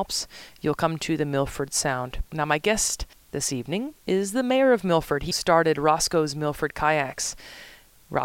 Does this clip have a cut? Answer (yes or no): yes